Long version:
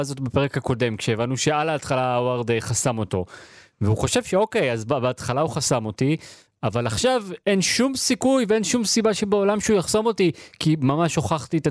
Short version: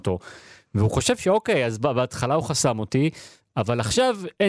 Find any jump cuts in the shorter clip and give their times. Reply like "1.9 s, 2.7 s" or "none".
none